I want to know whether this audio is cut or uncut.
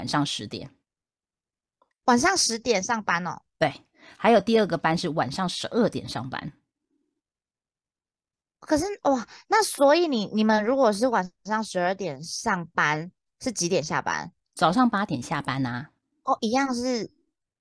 uncut